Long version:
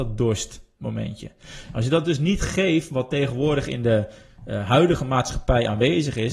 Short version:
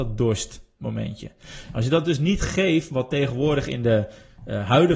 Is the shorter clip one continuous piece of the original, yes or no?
yes